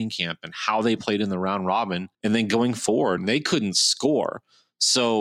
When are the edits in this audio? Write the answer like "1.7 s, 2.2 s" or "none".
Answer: 2.1 s, 3.2 s